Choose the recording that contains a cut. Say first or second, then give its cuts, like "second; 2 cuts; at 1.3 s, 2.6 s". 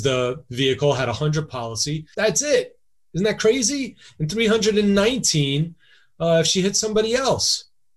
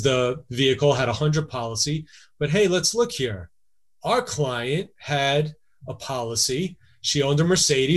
first; 1 cut; at 2.1 s